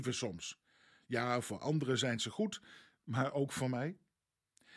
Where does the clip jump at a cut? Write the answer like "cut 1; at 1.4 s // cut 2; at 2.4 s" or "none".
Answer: none